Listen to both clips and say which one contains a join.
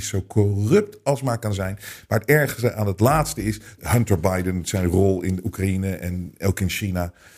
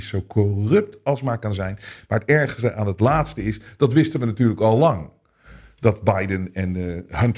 first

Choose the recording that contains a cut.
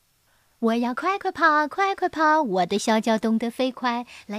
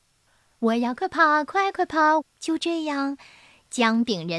second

